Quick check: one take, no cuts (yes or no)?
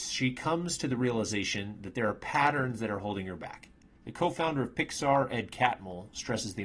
no